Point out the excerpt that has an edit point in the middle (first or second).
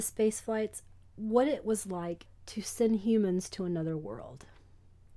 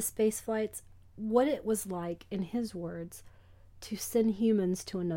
first